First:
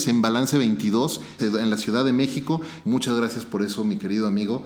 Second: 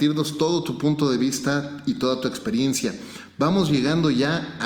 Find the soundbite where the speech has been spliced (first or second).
first